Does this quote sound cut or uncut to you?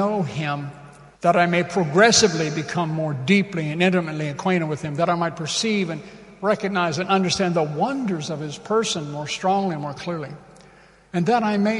cut